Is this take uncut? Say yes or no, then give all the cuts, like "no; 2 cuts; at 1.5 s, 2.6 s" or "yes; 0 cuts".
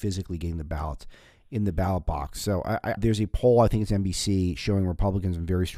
no; 1 cut; at 3.0 s